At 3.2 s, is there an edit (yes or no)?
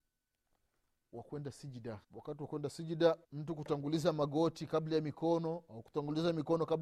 yes